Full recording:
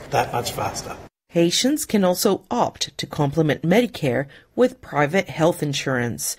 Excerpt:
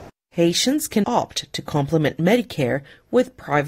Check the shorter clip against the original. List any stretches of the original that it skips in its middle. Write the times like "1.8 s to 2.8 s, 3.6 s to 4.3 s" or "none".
2.0 s to 2.5 s